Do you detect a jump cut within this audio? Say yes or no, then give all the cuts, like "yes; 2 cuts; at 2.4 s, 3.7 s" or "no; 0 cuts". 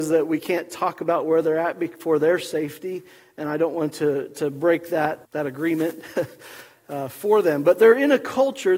yes; 1 cut; at 5.2 s